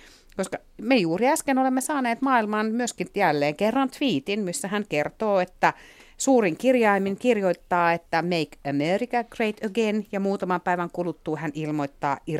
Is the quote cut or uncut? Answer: uncut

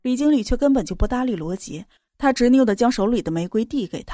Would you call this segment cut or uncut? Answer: cut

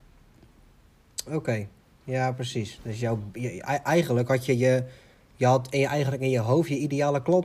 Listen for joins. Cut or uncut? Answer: uncut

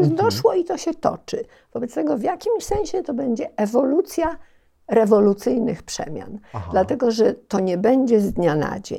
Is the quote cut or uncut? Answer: uncut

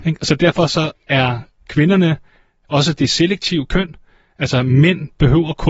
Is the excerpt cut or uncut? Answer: uncut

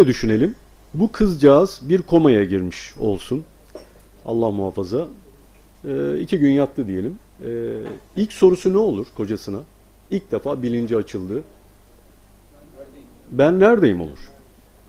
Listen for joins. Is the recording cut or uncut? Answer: cut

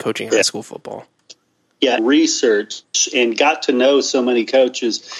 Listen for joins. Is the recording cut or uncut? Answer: cut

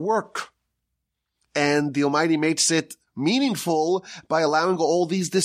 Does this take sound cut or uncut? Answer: uncut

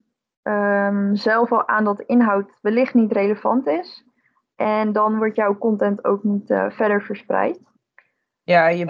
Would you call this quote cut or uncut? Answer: cut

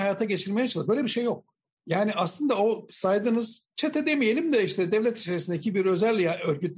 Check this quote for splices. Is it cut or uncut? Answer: uncut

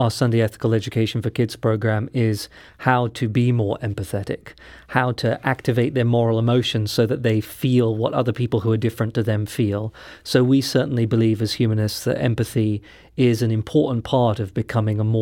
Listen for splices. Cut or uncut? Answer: uncut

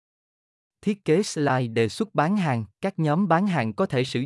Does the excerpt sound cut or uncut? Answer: cut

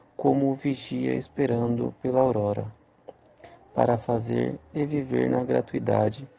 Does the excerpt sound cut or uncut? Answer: uncut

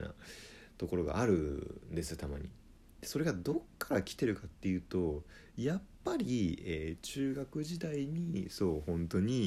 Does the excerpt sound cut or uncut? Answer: uncut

